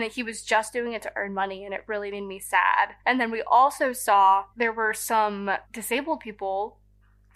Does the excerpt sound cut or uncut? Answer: cut